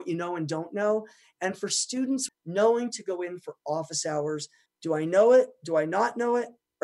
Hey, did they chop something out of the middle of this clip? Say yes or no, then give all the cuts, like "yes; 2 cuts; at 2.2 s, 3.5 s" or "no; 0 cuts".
yes; 2 cuts; at 2.3 s, 4.7 s